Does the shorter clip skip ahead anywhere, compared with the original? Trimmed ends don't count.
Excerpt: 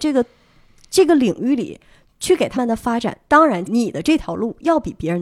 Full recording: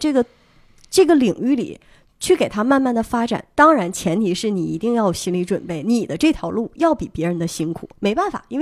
yes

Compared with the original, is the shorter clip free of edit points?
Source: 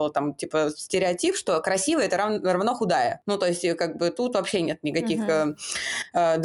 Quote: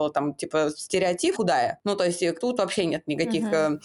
no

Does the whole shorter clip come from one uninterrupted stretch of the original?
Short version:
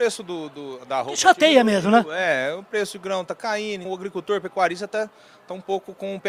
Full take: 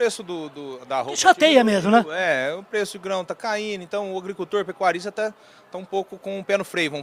no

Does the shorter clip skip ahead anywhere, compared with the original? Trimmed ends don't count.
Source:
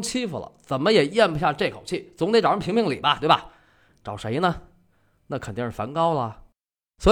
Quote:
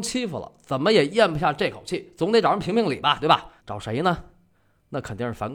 yes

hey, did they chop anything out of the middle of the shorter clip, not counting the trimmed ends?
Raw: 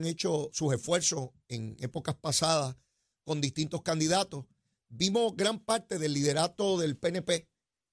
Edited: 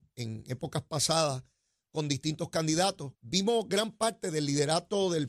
yes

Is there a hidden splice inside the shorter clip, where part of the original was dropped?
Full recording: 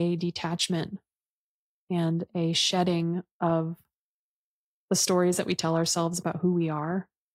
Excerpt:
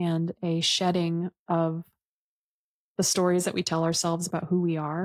no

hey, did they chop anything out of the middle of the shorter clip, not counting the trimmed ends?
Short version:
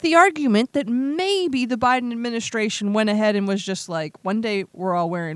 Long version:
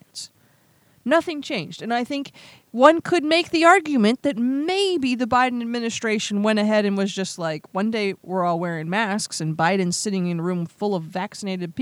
no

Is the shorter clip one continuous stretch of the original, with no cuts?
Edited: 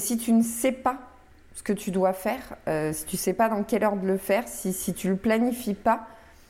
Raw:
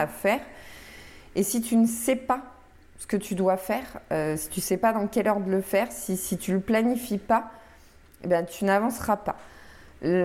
yes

